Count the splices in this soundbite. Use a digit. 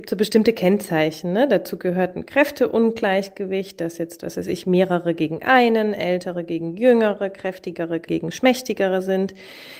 0